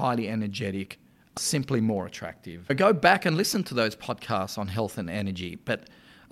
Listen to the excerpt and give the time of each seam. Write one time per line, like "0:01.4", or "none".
0:01.4